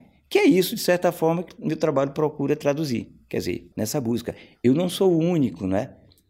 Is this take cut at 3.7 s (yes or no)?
yes